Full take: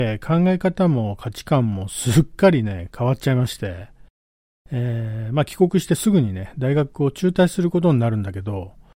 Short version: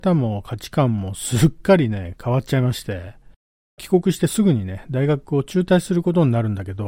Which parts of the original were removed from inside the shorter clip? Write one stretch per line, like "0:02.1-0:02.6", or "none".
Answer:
0:04.5-0:05.5